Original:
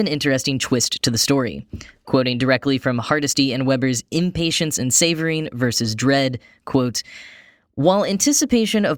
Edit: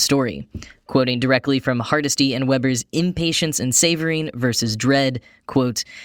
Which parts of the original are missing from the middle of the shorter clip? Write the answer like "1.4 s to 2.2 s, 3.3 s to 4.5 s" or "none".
none